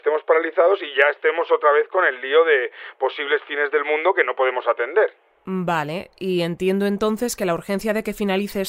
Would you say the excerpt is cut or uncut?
uncut